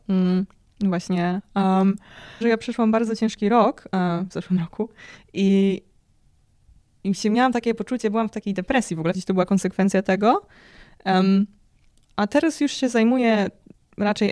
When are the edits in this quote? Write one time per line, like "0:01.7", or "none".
0:02.4
0:09.1